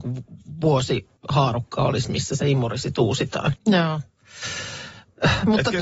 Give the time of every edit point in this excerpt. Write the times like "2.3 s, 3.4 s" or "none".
1.2 s, 3.6 s